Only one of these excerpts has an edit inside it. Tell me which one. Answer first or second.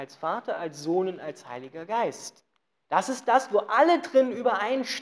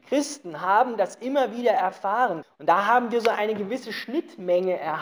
second